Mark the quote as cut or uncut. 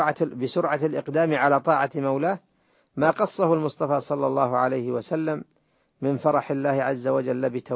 uncut